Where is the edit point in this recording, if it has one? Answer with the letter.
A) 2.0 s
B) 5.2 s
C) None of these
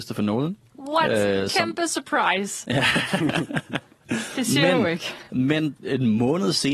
C